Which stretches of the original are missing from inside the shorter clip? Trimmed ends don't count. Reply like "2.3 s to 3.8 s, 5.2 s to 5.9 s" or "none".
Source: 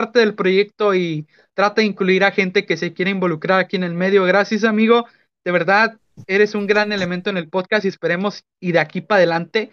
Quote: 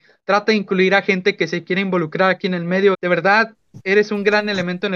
4.2 s to 5.4 s

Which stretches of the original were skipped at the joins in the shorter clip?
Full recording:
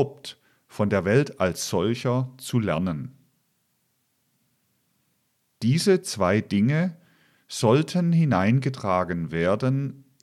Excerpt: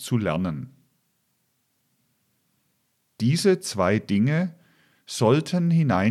none

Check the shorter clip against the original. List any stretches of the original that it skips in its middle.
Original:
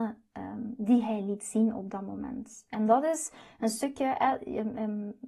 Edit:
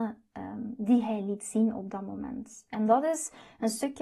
none

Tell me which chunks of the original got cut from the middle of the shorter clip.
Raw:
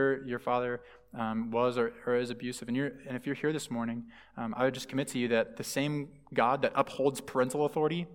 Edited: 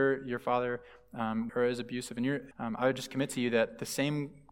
1.5 s to 2.0 s, 3.0 s to 4.3 s

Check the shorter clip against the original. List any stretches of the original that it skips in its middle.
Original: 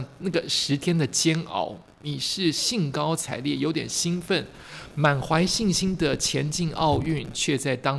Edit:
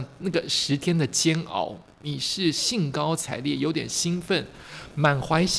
none

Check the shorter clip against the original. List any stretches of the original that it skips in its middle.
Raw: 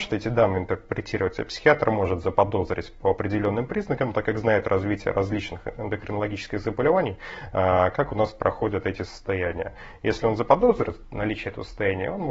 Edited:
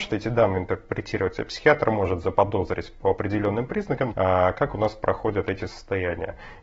4.1 s to 7.5 s

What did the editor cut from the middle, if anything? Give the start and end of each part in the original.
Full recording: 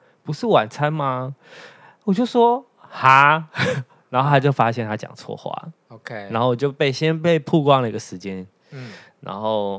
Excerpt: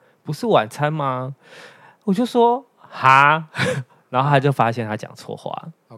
none

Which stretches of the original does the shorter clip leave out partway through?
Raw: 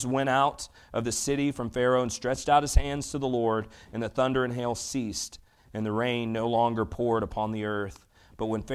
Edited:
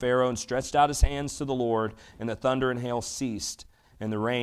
none

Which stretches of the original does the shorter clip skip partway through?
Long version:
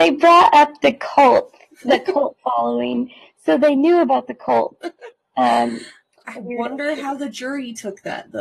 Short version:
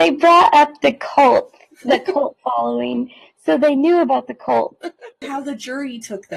5.2 s to 7.0 s

